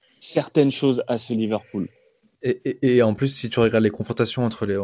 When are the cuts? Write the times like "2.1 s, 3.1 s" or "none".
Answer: 2.4 s